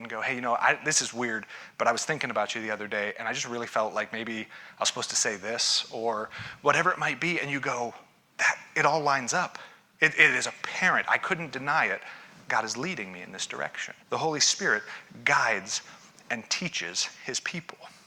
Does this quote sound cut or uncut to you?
cut